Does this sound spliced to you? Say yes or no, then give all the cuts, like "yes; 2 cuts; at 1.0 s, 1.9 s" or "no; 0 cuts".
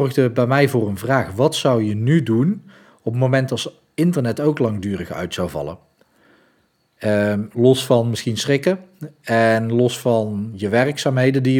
no; 0 cuts